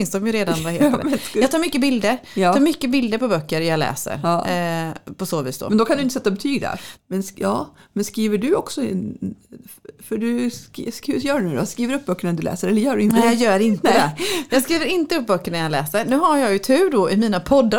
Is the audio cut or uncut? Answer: cut